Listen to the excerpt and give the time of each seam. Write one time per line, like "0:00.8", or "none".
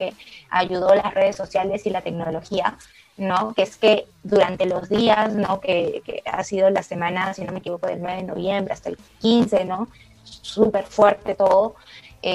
none